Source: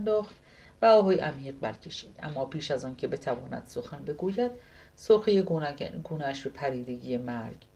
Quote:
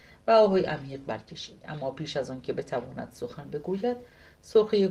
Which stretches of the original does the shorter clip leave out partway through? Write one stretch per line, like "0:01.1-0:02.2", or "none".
none